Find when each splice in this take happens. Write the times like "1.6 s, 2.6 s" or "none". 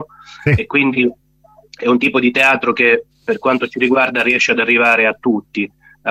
none